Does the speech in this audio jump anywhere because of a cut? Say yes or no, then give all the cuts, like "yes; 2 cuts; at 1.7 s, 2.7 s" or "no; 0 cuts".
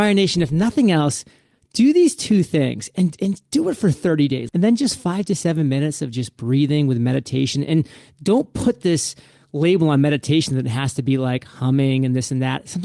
yes; 1 cut; at 4.5 s